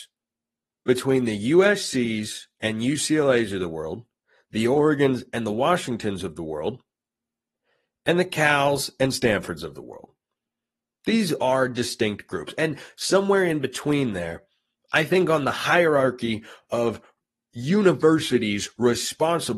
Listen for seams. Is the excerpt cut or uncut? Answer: uncut